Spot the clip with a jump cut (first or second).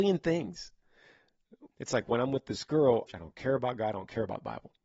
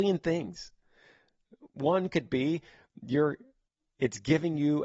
first